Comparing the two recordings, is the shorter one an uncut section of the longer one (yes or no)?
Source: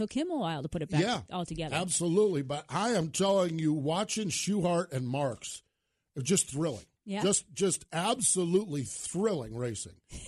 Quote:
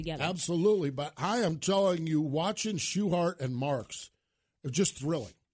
yes